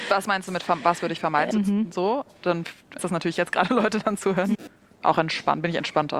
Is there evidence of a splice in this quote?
yes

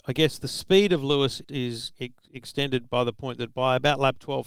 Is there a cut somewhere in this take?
yes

